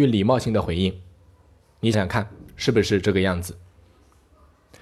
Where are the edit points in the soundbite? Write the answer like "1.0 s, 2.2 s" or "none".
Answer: 1.9 s